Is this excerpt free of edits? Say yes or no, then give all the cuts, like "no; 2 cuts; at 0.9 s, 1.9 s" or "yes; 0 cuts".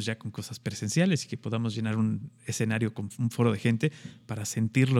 yes; 0 cuts